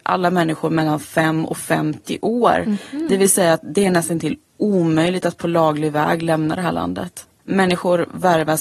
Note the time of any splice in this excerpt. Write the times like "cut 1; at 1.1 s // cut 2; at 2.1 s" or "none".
cut 1; at 7.4 s

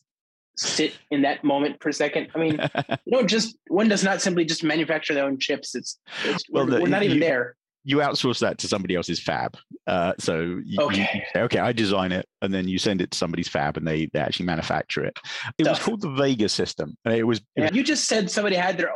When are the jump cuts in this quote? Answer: cut 1; at 15.6 s // cut 2; at 17.7 s

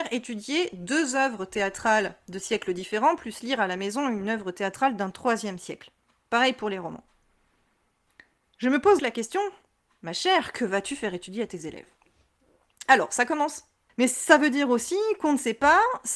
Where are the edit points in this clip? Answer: cut 1; at 9.0 s // cut 2; at 13.9 s

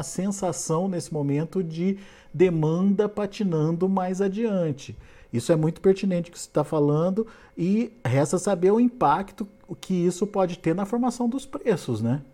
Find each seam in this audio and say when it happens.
none

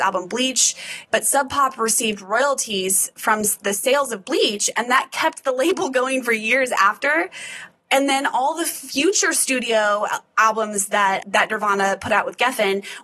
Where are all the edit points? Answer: cut 1; at 1.1 s // cut 2; at 11.2 s

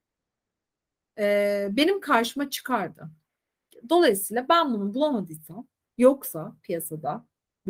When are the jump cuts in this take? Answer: none

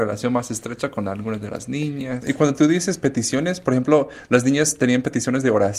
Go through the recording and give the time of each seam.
cut 1; at 2.2 s

